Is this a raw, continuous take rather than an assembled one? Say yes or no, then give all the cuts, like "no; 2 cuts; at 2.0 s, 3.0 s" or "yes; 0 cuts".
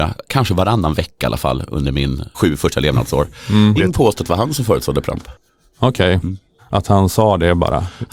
no; 3 cuts; at 2.3 s, 3.8 s, 6.6 s